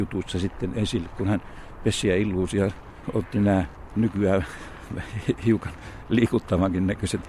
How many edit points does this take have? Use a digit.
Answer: 0